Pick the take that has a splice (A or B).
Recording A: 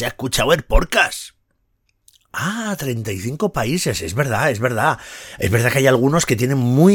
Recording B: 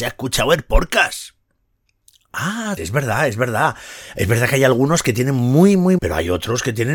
B